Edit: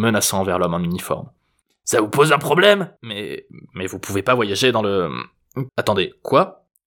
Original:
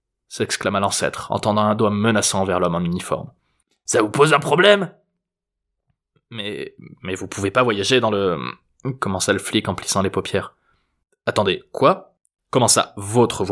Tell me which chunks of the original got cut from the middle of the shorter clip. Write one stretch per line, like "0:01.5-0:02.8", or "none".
0:05.0-0:06.2
0:09.0-0:11.2